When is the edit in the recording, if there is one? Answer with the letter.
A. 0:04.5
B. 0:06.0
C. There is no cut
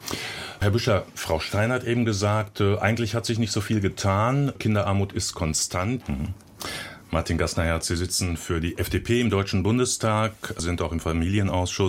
B